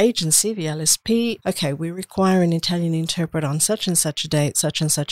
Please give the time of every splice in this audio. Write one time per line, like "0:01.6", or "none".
0:01.4